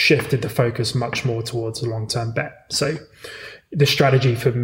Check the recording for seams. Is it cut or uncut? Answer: uncut